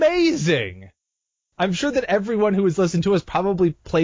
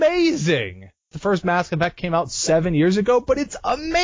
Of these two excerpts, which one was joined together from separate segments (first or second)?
second